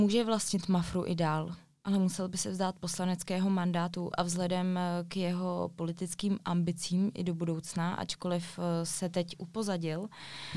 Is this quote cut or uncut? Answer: uncut